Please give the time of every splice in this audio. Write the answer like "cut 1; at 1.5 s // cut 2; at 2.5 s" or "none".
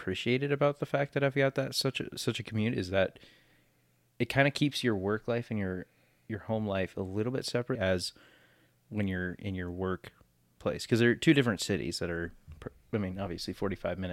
cut 1; at 7.8 s